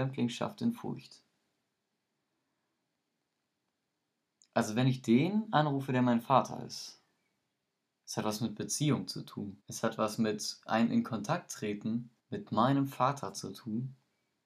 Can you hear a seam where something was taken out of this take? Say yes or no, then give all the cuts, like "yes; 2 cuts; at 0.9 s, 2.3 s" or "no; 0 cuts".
yes; 2 cuts; at 9.6 s, 12.2 s